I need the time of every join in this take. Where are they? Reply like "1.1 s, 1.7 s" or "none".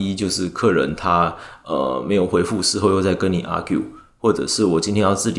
none